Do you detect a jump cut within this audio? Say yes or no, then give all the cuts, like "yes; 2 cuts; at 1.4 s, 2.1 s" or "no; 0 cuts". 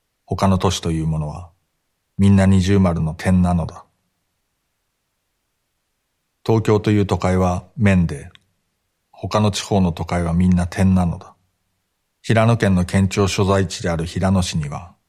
yes; 1 cut; at 12.1 s